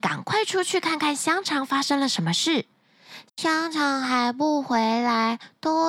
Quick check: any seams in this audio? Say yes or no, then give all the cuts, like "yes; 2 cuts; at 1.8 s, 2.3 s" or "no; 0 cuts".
yes; 1 cut; at 3.3 s